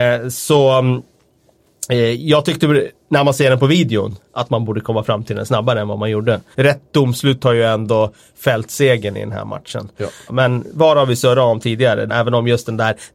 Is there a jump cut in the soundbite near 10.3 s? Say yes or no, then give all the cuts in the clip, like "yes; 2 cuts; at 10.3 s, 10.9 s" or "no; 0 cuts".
yes; 3 cuts; at 6.5 s, 10.3 s, 12.1 s